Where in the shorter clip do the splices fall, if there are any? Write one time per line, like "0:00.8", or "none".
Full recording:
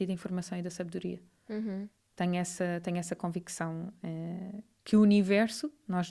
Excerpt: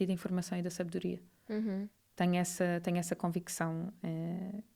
none